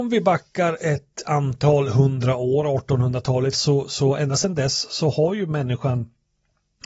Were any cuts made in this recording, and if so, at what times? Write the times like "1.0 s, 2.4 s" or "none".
3.5 s